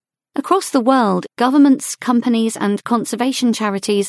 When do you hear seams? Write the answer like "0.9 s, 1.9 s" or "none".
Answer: none

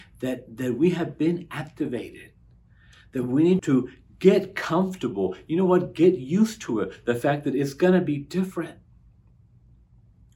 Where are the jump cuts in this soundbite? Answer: 3.6 s

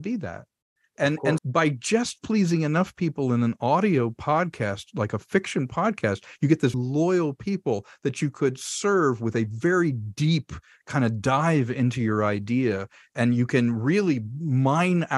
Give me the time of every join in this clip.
1.4 s, 6.7 s

